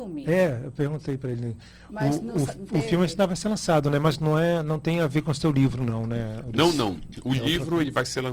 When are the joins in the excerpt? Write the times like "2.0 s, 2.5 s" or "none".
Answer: none